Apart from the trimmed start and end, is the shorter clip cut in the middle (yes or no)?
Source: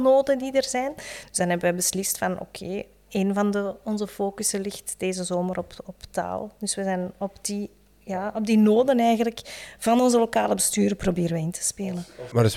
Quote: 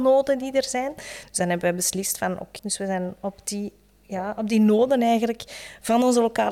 yes